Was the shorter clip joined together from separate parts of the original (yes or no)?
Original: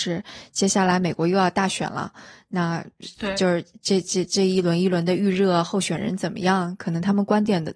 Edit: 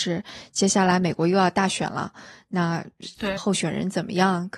yes